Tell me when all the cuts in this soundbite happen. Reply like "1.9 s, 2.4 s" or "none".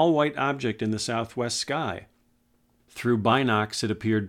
2.8 s